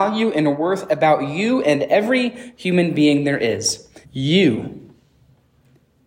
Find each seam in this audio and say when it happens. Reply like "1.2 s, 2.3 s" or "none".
4.0 s